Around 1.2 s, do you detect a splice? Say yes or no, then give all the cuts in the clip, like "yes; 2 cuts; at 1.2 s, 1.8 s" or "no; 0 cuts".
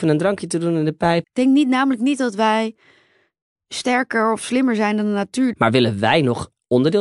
yes; 2 cuts; at 1.2 s, 5.5 s